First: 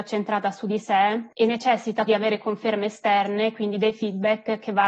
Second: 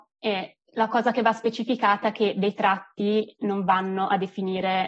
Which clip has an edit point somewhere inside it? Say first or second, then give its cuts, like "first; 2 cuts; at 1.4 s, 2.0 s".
first; 1 cut; at 2.1 s